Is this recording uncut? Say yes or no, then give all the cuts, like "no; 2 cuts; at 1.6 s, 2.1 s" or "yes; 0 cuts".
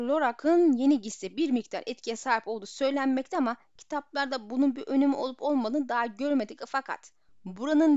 yes; 0 cuts